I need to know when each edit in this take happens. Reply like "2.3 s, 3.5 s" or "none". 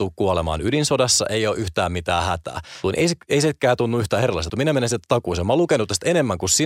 2.8 s, 4.5 s

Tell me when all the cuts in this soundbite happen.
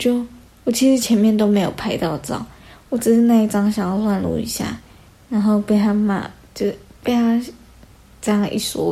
none

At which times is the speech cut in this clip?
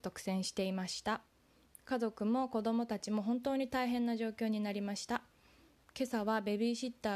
none

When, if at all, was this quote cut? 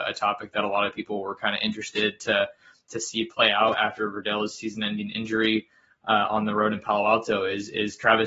none

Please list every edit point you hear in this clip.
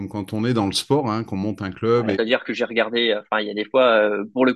2.1 s

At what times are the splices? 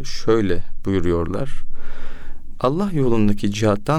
2.5 s

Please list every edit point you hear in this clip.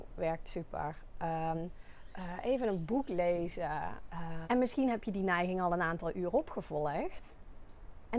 1.5 s, 4.4 s

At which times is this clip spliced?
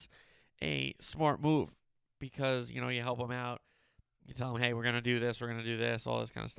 none

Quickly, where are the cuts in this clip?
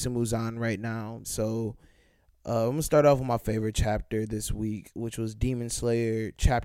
1.2 s

